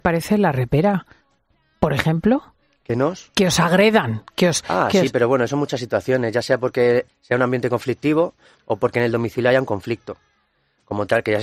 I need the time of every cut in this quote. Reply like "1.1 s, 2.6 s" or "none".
7.1 s, 8.6 s